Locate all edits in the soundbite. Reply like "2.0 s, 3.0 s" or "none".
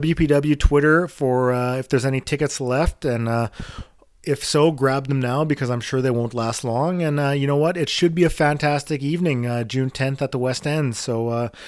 none